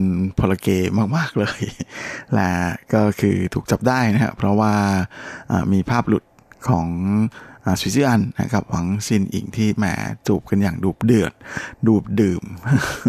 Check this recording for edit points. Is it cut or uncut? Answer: uncut